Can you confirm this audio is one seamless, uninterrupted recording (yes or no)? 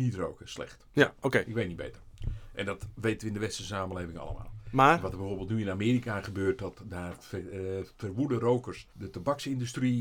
no